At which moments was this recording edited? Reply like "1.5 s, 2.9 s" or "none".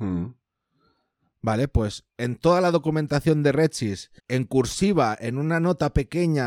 4.2 s